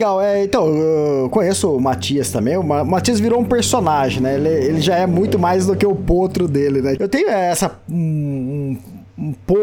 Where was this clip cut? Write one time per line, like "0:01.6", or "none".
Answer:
0:07.0